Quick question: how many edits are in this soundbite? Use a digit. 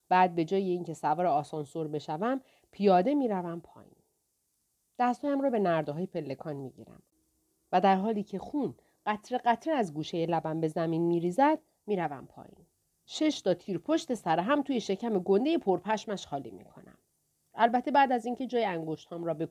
2